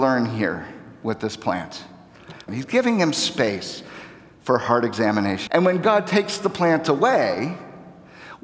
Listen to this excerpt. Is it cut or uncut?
cut